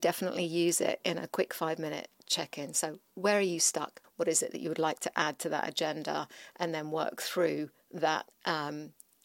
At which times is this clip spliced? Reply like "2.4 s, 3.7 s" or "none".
4.0 s